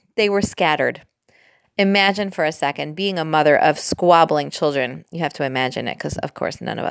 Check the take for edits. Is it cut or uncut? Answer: cut